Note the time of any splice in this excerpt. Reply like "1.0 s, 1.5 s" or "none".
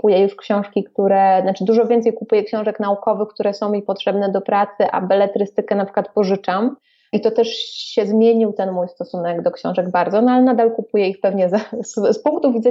none